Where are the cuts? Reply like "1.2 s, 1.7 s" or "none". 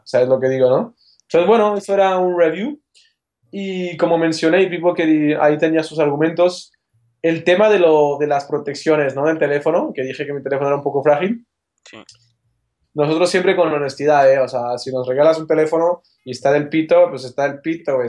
12.8 s